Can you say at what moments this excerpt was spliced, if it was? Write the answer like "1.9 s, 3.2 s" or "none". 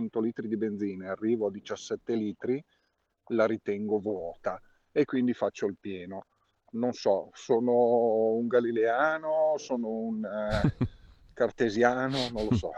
none